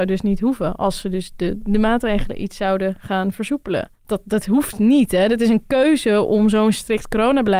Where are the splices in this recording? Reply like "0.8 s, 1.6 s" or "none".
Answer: 4.0 s